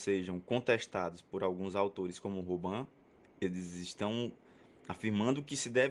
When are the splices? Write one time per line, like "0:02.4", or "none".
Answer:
0:03.2